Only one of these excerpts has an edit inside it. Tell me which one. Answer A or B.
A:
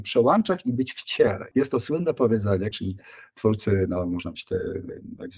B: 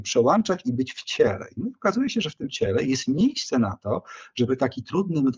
A